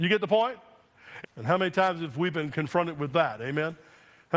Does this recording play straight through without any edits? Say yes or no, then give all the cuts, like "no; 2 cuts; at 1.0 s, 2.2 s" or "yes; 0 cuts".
no; 1 cut; at 1.2 s